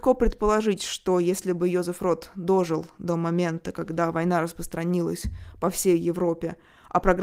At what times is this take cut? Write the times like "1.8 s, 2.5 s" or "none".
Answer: none